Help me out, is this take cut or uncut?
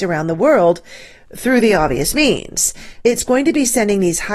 cut